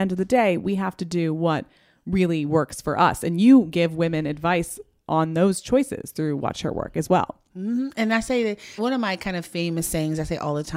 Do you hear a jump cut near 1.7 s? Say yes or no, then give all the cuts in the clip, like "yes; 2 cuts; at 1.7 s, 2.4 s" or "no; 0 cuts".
no; 1 cut; at 8.8 s